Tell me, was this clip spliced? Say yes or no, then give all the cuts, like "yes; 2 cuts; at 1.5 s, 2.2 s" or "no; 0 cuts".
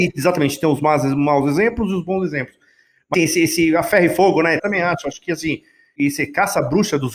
yes; 2 cuts; at 3.1 s, 4.6 s